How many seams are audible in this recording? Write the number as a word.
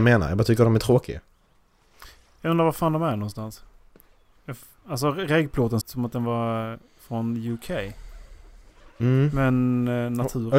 one